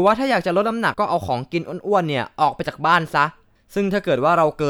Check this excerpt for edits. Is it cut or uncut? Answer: cut